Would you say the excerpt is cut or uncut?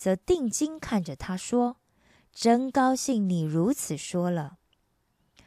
uncut